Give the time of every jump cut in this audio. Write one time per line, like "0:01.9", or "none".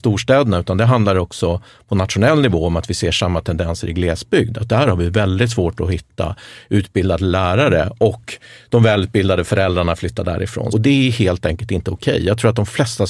0:10.7